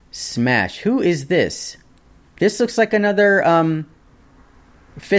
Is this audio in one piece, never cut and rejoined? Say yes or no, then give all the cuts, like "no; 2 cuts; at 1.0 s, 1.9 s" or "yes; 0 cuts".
yes; 0 cuts